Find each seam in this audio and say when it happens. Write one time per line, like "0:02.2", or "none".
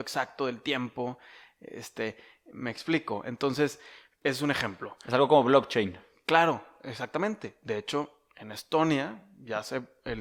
none